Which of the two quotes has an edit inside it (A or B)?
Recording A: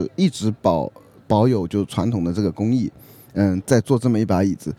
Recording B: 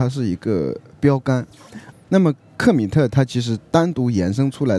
B